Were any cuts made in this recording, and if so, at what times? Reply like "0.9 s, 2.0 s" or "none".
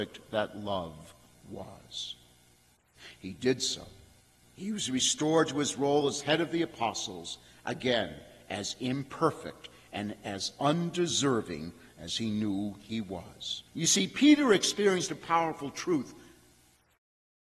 13.7 s